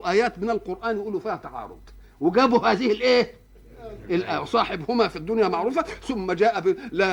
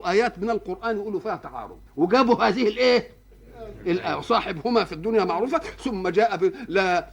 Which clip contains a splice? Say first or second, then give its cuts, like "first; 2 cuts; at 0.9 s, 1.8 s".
second; 1 cut; at 1.9 s